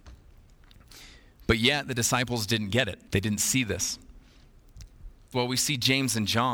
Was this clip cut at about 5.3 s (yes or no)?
yes